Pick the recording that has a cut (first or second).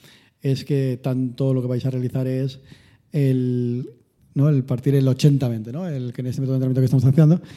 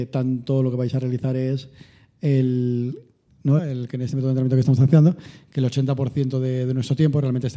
second